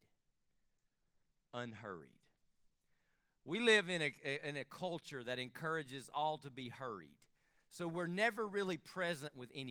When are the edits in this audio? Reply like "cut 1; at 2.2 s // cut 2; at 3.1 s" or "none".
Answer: none